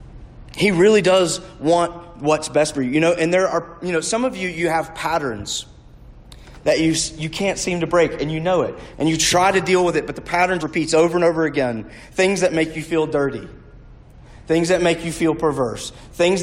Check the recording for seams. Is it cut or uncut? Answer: cut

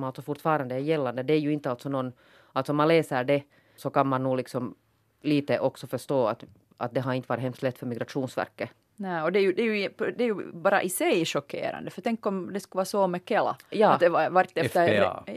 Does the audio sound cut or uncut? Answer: cut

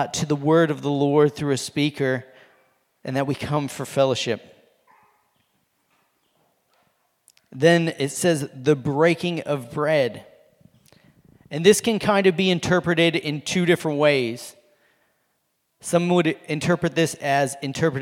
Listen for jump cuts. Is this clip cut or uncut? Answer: uncut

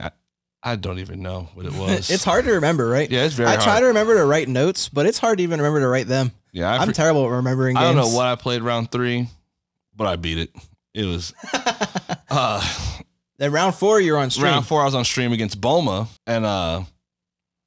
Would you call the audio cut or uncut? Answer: cut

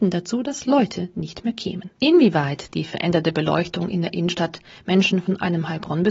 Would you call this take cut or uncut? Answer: cut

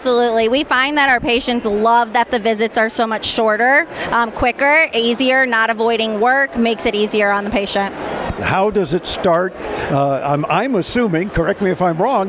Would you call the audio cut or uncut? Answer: cut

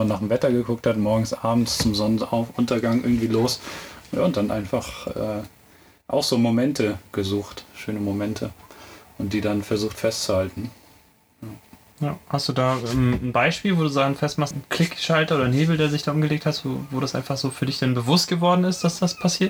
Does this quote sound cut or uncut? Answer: cut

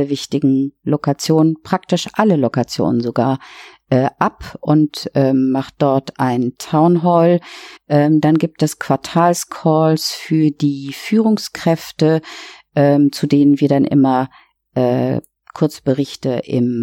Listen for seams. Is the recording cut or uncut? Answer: cut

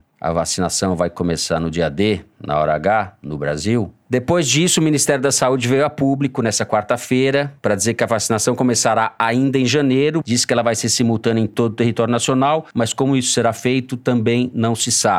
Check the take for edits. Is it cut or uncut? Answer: uncut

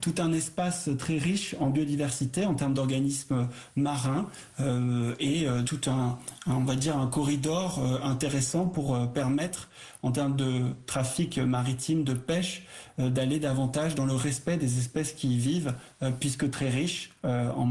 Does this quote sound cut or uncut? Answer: cut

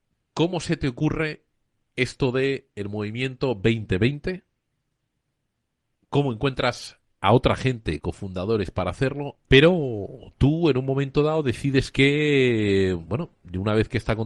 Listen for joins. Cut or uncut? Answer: cut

